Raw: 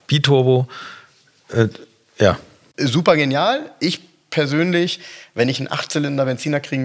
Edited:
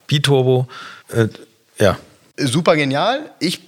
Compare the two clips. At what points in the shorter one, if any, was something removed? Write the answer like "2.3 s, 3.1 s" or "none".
1.0 s